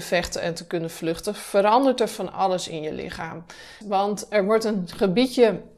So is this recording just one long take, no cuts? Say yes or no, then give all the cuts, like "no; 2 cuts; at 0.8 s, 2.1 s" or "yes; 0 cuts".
no; 1 cut; at 3.8 s